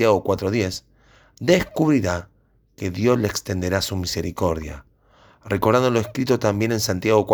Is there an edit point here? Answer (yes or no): no